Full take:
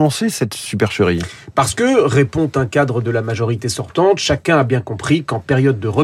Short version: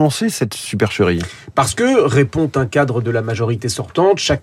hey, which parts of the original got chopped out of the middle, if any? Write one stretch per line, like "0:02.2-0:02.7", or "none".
none